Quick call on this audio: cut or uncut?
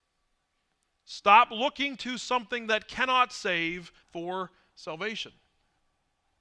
cut